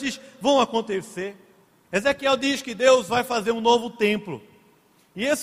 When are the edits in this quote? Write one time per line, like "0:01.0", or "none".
0:01.8